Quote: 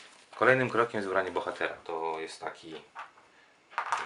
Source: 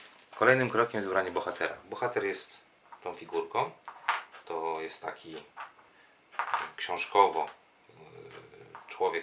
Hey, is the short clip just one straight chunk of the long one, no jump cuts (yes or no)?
no